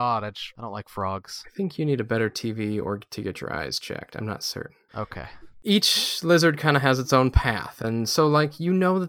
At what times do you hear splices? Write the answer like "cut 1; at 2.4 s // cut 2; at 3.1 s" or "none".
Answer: none

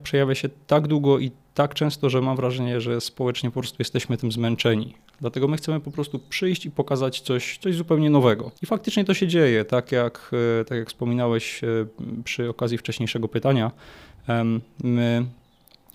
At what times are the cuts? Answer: cut 1; at 8.6 s

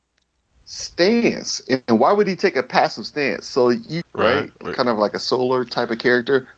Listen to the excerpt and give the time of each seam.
cut 1; at 4.0 s

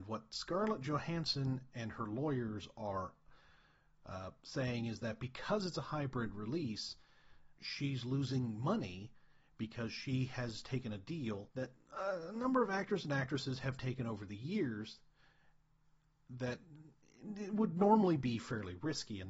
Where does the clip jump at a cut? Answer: cut 1; at 7.6 s // cut 2; at 11.5 s

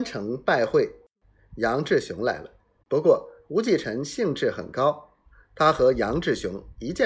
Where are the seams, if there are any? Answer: cut 1; at 2.8 s

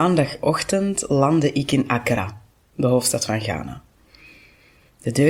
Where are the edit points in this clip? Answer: none

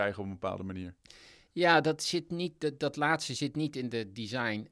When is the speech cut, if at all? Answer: none

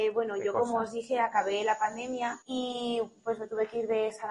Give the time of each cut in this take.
cut 1; at 2.4 s

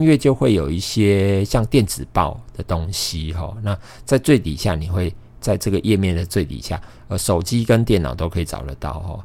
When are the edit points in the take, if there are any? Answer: none

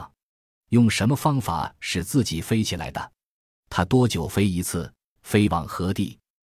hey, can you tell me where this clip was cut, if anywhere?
cut 1; at 5.2 s

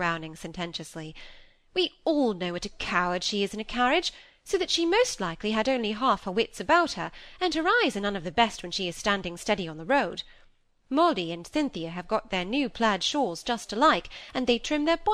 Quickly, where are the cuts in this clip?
none

